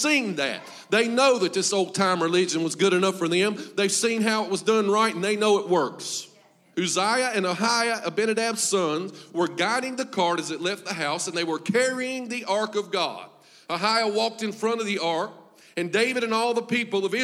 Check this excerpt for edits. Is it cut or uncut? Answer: cut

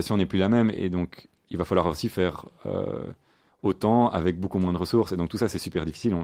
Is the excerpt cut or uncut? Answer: uncut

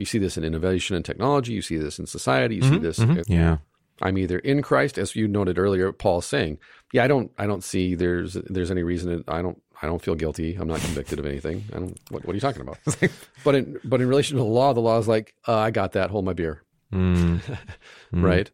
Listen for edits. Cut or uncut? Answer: cut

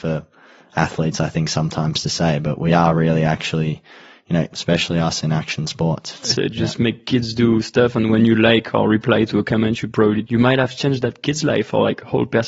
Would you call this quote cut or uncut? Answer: cut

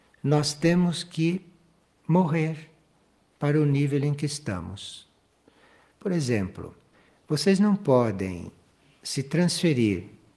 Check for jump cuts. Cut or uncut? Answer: uncut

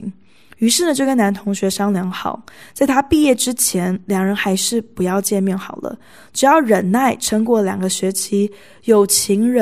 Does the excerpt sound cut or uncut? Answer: uncut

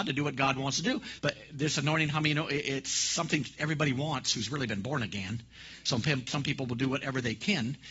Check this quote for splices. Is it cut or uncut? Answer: cut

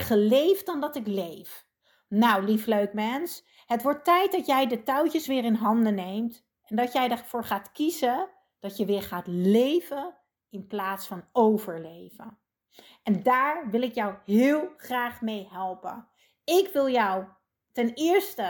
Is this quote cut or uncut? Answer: uncut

